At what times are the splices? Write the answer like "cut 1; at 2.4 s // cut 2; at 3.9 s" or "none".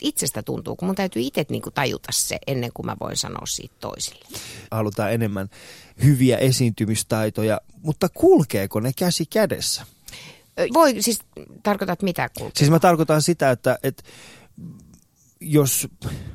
cut 1; at 4.7 s // cut 2; at 10.7 s

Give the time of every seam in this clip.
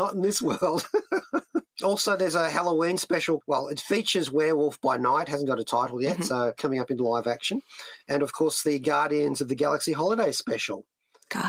none

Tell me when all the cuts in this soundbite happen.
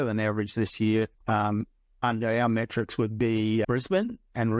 cut 1; at 1.1 s // cut 2; at 3.6 s

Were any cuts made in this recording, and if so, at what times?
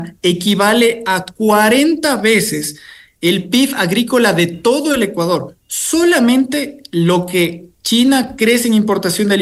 none

